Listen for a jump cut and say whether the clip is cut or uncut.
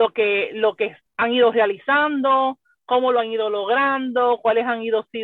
uncut